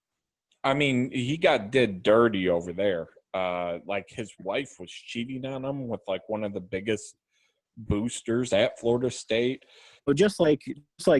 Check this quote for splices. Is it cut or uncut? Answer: cut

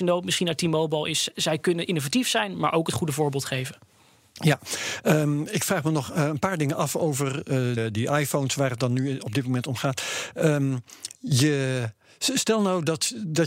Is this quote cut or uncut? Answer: cut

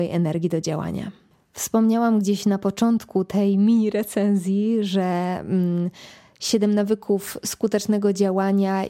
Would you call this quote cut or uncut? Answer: uncut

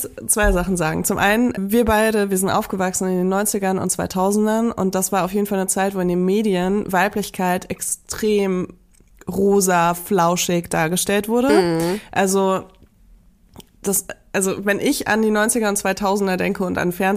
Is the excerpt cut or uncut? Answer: cut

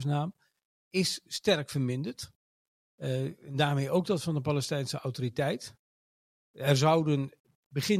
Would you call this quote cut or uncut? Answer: uncut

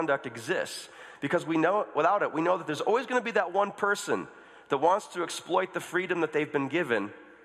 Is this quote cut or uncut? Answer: uncut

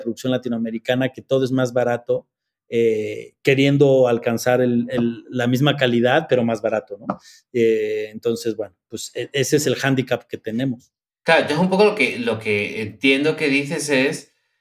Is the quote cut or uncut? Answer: uncut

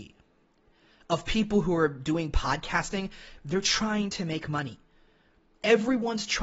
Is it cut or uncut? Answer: cut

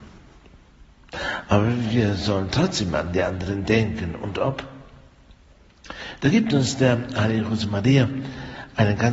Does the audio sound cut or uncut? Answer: uncut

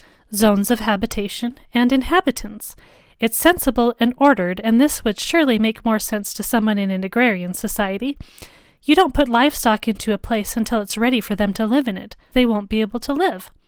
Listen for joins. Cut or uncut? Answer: cut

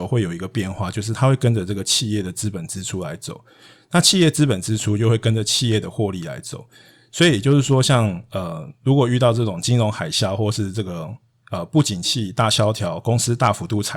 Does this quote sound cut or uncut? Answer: uncut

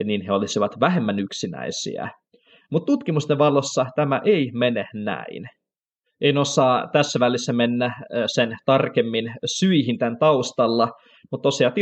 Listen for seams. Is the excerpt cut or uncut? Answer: uncut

